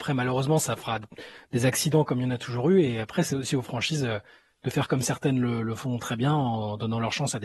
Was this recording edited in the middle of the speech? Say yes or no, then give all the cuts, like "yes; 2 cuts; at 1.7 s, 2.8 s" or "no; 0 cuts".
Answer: no; 0 cuts